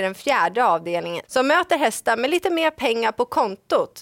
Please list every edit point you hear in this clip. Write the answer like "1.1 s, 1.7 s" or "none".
1.2 s